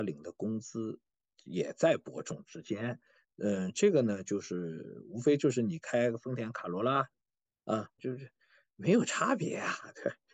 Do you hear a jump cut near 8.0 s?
yes; 1 cut; at 8.0 s

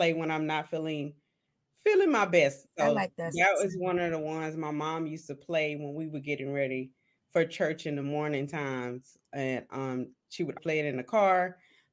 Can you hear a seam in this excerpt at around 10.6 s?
yes; 2 cuts; at 2.7 s, 10.6 s

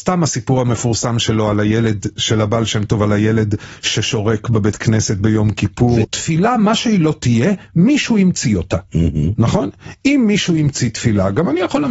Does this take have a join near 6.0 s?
yes; 1 cut; at 6.0 s

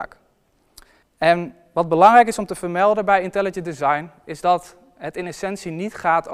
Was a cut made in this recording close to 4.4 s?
no; 1 cut; at 1.0 s

